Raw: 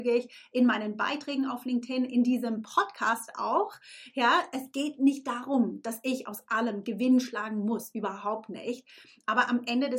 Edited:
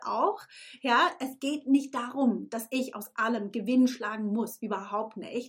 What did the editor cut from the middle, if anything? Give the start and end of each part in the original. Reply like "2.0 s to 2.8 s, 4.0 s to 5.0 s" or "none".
none